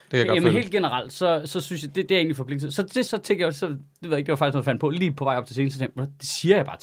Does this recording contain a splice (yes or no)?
yes